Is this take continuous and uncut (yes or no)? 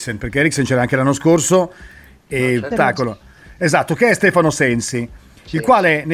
no